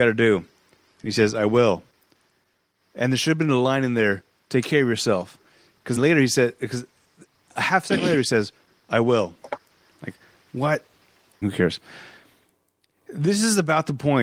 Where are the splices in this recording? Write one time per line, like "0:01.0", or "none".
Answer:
0:06.0
0:11.4